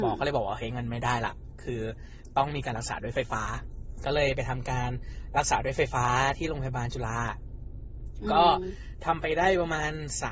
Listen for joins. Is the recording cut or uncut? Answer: uncut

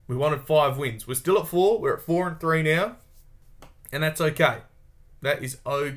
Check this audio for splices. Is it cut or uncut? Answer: uncut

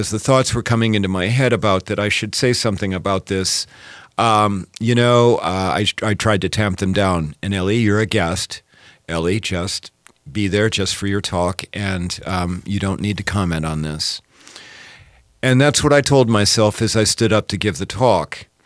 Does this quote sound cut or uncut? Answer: uncut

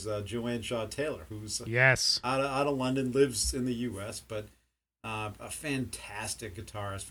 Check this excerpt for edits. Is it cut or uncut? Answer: uncut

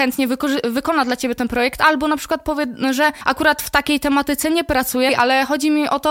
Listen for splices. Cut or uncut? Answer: cut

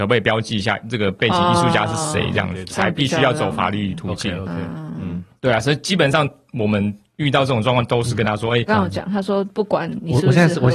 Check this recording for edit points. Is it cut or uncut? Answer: cut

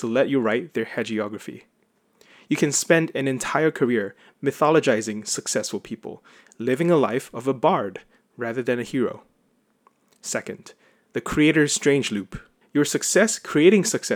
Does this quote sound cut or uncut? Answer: cut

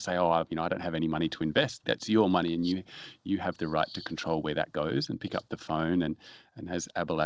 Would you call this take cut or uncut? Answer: cut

